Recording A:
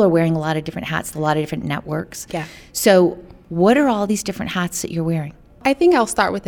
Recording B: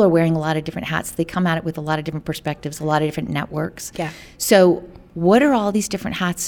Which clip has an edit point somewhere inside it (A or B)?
A